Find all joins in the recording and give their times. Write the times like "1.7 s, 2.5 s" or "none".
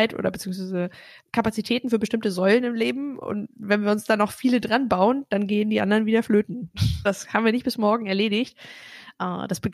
7.1 s